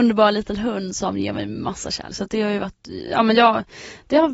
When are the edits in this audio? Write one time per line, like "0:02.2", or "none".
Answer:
0:02.1